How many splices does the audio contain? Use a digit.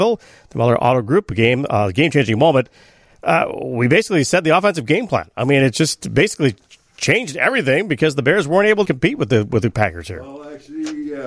1